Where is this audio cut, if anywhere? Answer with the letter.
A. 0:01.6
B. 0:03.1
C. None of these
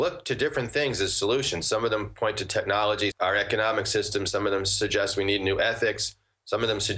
B